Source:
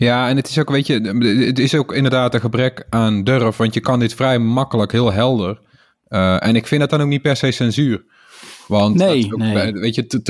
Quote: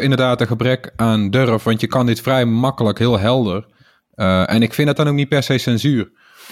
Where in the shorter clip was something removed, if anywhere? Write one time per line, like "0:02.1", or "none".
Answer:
none